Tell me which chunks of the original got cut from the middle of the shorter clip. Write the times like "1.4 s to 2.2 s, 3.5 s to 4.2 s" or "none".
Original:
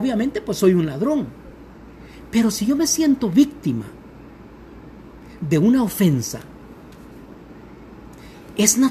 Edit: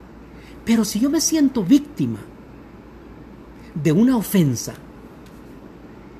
none